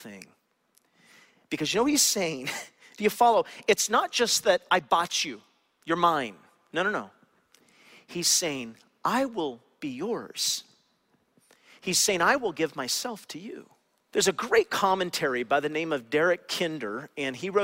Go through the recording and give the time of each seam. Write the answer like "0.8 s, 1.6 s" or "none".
14.1 s